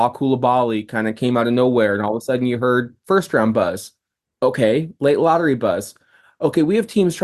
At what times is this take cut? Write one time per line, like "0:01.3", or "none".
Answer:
none

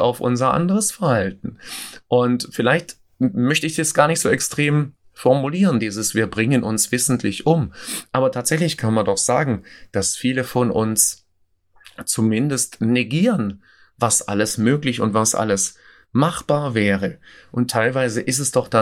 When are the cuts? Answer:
none

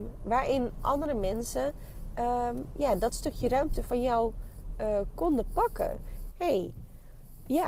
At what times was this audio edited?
0:06.3

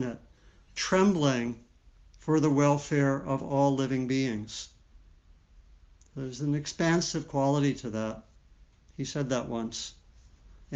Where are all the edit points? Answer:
0:08.9

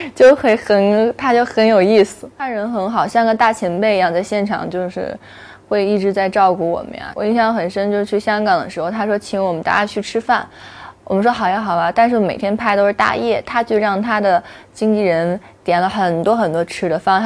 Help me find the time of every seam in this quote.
none

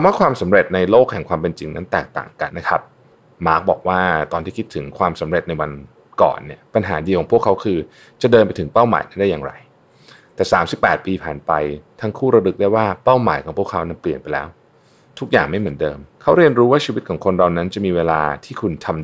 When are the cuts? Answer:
0:02.5
0:16.1

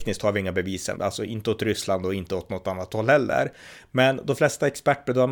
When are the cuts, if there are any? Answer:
0:01.0

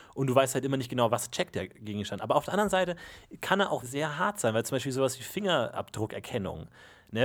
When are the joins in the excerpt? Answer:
0:03.8

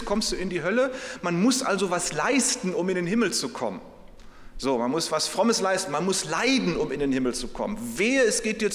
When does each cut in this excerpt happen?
none

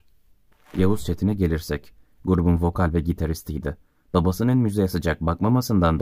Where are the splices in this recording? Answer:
none

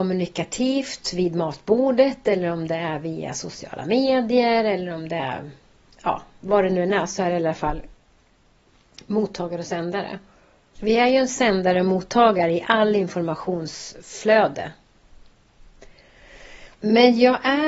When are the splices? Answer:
0:10.7
0:16.7

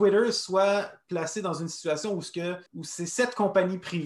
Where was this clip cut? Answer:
0:02.7

